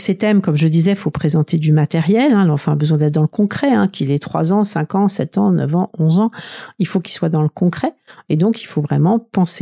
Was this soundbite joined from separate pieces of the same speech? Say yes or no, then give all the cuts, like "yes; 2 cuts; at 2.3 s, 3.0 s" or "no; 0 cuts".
no; 0 cuts